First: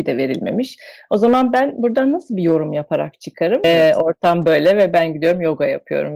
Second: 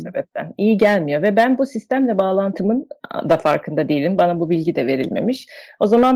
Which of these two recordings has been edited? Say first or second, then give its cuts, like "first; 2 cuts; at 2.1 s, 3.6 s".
first; 1 cut; at 3.6 s